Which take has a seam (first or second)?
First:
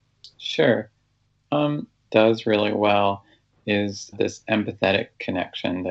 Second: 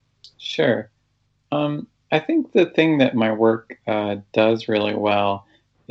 first